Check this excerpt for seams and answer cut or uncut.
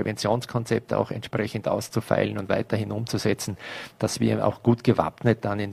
uncut